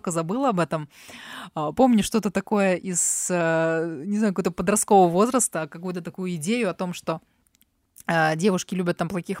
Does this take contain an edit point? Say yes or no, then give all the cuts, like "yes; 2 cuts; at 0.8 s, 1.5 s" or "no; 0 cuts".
no; 0 cuts